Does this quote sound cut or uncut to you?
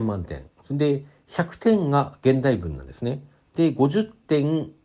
uncut